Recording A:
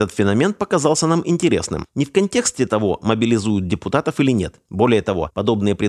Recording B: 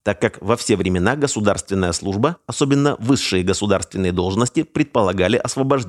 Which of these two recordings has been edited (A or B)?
A